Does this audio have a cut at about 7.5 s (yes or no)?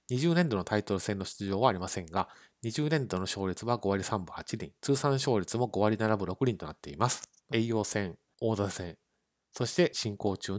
yes